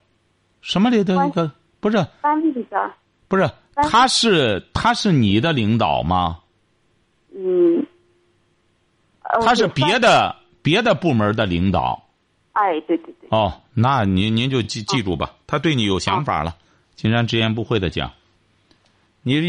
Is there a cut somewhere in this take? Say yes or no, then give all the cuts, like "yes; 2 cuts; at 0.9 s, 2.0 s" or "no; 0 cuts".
no; 0 cuts